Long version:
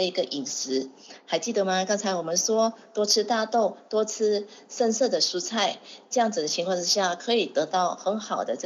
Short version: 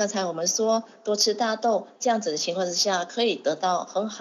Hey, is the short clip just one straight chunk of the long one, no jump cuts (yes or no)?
no